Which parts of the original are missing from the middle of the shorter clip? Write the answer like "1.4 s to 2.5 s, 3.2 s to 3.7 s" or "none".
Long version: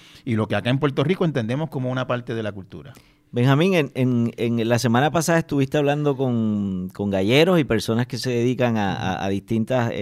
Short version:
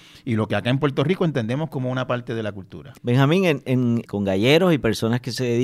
3.0 s to 3.3 s, 4.3 s to 6.9 s